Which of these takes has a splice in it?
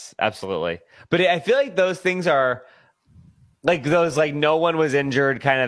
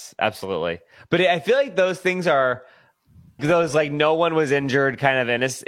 second; 1 cut; at 3.4 s

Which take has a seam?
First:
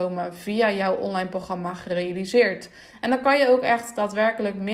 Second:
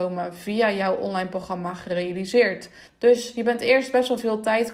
second; 1 cut; at 2.9 s

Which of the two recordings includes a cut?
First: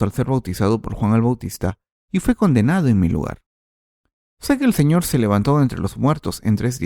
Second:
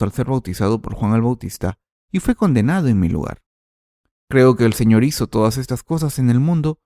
second; 1 cut; at 4.1 s

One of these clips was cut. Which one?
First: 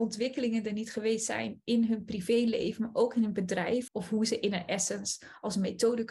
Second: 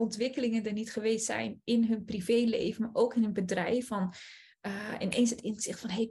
first; 1 cut; at 3.9 s

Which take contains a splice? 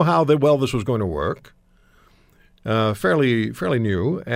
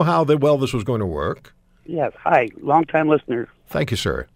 second; 1 cut; at 1.8 s

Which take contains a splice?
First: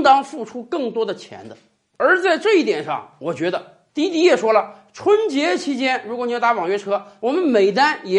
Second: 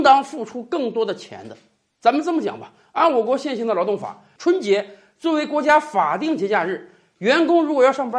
first; 2 cuts; at 1.9 s, 3.9 s

